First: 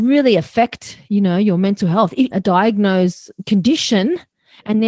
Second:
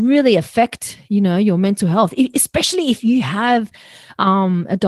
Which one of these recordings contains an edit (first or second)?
first